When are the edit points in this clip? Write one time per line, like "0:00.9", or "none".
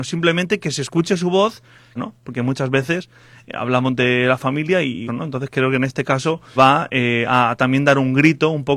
0:02.0
0:05.1
0:06.6